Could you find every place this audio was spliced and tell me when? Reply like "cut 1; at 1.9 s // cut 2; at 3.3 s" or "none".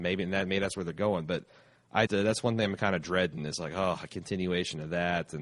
cut 1; at 2.1 s